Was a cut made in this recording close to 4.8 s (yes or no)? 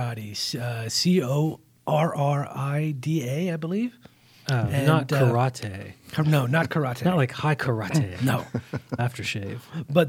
no